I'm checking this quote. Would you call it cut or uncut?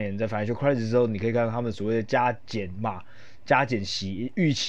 uncut